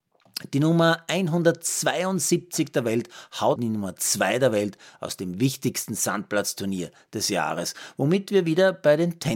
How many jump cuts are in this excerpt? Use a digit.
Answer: 1